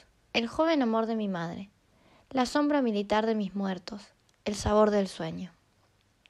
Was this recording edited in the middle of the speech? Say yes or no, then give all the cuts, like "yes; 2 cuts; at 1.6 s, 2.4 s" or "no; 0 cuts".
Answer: yes; 1 cut; at 4.3 s